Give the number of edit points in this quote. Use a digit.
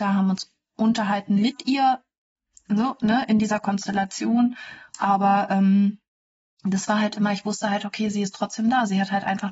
0